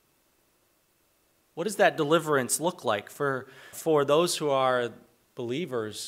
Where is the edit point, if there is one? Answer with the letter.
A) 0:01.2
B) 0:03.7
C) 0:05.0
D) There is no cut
B